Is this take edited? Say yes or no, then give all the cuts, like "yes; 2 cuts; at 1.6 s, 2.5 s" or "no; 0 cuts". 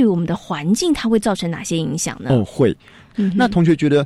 yes; 1 cut; at 3.1 s